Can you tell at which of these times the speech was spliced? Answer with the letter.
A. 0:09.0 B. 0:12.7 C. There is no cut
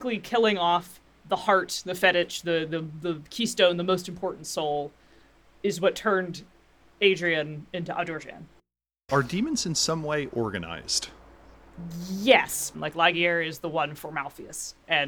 B